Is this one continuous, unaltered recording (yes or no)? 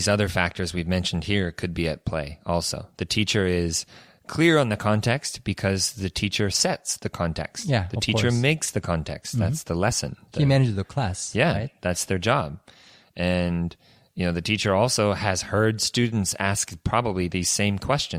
yes